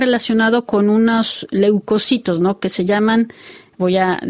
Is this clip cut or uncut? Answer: uncut